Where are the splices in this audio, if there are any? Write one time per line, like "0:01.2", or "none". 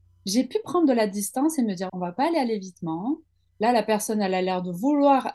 0:01.9